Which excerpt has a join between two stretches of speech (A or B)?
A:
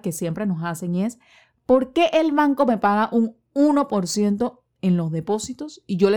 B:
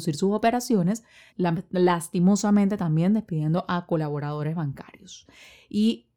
B